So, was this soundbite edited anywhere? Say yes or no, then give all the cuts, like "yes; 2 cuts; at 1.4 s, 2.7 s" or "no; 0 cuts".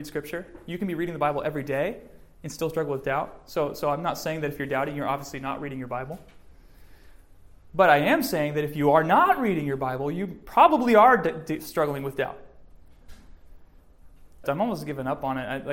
yes; 1 cut; at 14.4 s